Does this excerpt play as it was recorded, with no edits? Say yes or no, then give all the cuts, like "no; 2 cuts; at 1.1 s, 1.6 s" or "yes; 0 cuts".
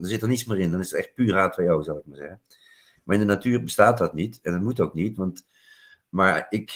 yes; 0 cuts